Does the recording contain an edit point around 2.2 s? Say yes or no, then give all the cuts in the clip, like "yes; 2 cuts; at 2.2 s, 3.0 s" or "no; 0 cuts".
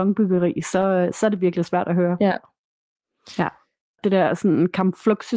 no; 1 cut; at 4.0 s